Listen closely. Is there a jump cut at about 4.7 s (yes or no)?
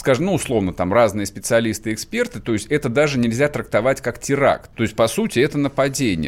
yes